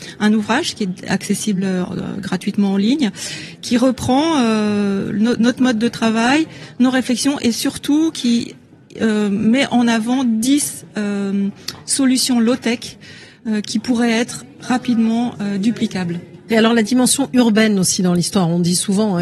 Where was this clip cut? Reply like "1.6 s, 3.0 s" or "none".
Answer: 16.5 s